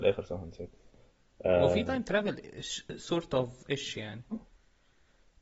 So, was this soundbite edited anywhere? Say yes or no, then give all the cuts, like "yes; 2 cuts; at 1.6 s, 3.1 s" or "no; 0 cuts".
yes; 1 cut; at 4.3 s